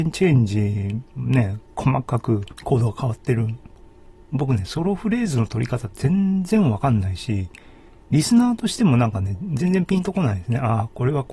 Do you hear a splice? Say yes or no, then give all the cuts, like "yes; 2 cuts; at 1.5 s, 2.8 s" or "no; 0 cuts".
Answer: no; 0 cuts